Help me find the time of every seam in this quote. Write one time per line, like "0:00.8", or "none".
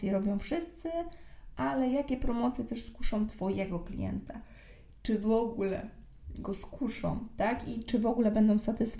none